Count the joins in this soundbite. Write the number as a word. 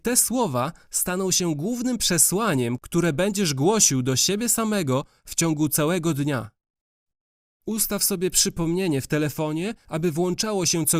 zero